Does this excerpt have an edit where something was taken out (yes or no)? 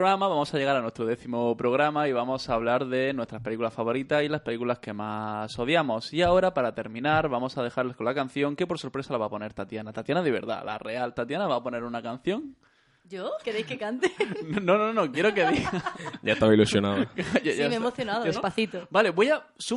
yes